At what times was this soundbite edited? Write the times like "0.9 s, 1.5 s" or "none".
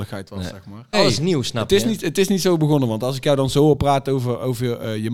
0.9 s